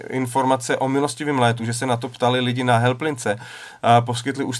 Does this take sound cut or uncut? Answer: uncut